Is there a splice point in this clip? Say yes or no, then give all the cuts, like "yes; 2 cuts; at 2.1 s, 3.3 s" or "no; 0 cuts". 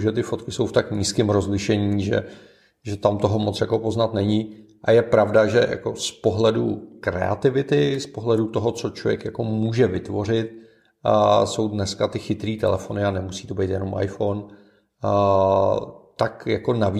no; 0 cuts